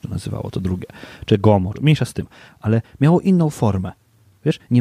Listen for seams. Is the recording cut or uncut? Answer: cut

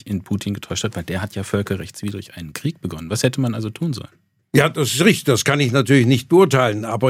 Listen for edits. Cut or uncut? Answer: uncut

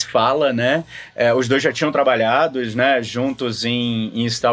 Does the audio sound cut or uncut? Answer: uncut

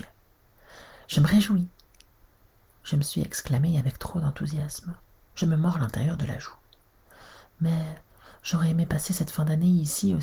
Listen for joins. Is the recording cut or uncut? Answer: uncut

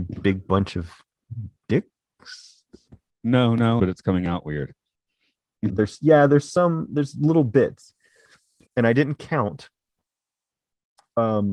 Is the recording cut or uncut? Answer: cut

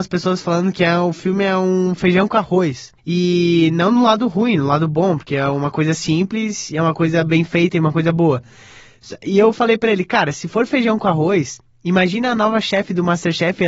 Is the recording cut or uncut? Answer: uncut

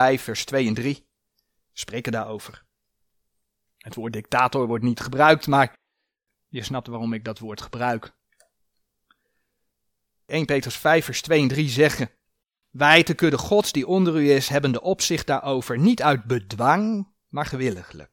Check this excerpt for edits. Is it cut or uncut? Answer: uncut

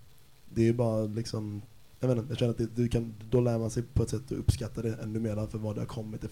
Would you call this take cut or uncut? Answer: uncut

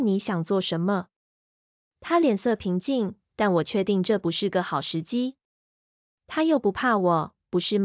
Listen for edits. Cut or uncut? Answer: cut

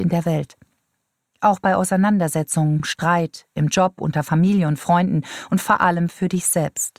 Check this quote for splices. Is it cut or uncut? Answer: uncut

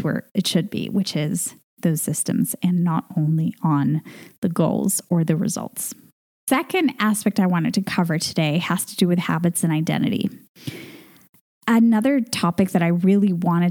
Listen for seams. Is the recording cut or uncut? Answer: uncut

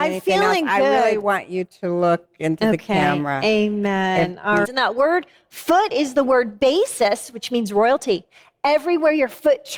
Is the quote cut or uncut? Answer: cut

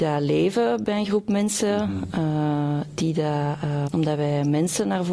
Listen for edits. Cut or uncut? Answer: cut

